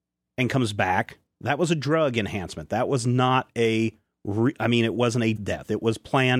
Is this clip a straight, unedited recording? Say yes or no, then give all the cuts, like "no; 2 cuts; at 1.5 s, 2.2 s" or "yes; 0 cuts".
no; 1 cut; at 5.4 s